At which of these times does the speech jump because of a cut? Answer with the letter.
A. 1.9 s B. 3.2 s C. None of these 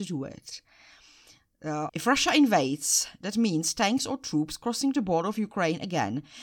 A